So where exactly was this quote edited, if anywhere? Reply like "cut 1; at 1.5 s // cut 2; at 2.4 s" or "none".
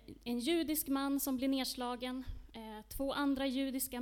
none